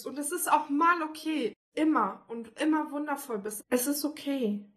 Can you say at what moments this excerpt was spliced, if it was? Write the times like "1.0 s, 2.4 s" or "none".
1.7 s, 3.6 s